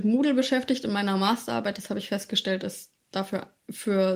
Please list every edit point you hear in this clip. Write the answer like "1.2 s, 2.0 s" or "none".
none